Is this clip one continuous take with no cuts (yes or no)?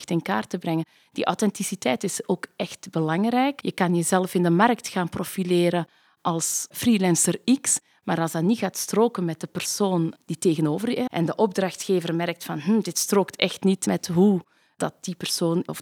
no